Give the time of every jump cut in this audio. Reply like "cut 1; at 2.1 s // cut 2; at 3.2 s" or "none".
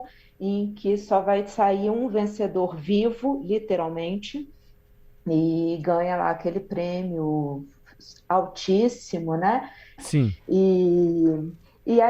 cut 1; at 10.0 s